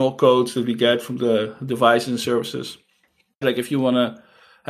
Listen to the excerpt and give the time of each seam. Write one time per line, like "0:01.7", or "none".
0:03.4

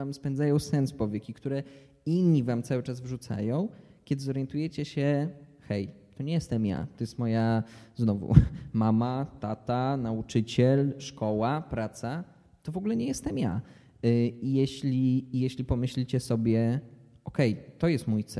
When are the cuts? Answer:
none

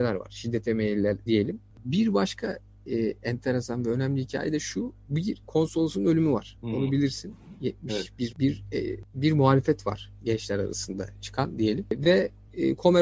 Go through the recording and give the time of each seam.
0:01.3
0:05.4
0:08.3

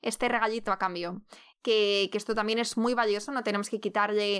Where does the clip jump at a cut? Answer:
0:01.5

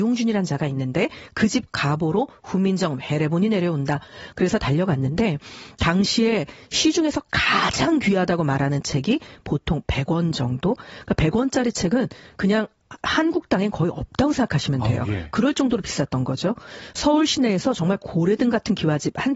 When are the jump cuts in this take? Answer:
0:04.3

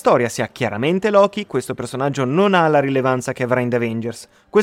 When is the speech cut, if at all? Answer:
none

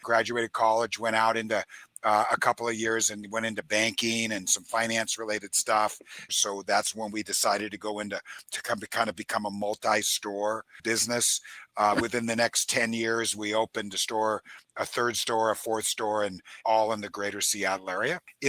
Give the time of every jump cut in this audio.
0:06.3
0:16.6

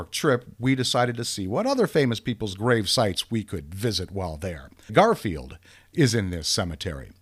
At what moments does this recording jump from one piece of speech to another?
0:04.9

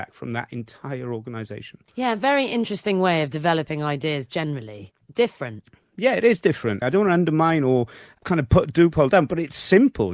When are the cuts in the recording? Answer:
0:01.9
0:06.8

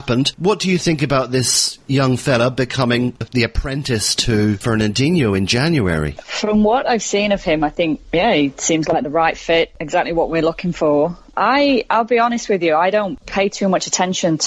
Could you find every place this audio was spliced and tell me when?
none

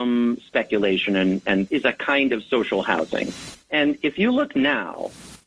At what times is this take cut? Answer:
0:01.7

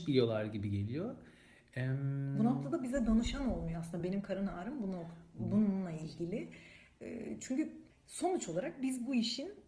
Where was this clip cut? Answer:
none

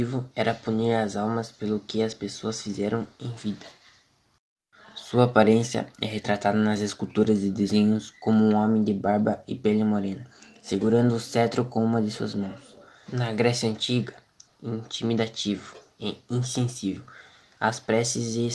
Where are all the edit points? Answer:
0:13.1
0:14.5

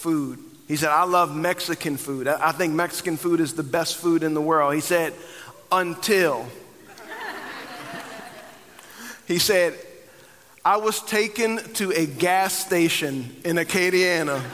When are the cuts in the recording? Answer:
none

